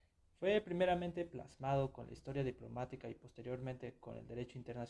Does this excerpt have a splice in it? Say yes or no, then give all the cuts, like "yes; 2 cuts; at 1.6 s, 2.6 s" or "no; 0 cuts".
no; 0 cuts